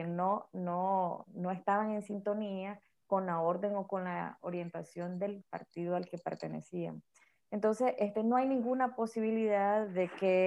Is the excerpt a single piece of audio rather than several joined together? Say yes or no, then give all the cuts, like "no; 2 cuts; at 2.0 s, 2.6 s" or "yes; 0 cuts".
yes; 0 cuts